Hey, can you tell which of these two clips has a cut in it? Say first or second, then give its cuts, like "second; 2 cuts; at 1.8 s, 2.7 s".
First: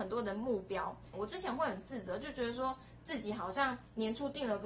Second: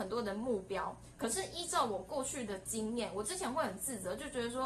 first; 1 cut; at 1.1 s